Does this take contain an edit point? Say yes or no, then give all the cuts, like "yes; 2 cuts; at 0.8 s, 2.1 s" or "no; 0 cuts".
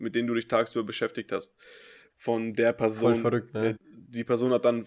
yes; 2 cuts; at 2.1 s, 3.8 s